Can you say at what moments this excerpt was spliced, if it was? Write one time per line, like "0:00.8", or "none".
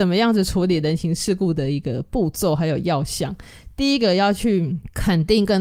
none